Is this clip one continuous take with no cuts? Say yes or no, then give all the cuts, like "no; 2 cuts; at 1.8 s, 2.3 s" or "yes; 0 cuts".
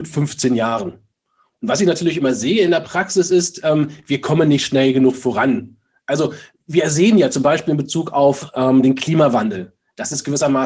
yes; 0 cuts